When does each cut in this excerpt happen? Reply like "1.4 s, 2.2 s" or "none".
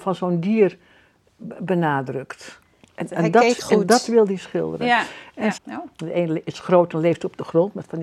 5.6 s